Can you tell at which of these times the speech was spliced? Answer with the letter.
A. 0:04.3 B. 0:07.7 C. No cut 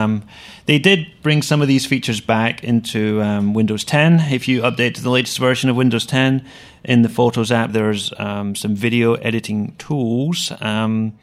B